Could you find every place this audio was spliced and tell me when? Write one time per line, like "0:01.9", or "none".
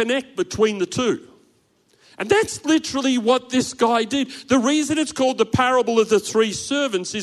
none